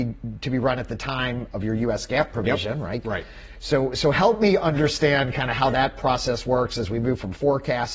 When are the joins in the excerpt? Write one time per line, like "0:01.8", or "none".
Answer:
0:03.0